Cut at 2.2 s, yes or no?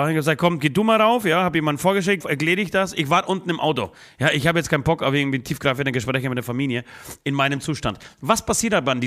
yes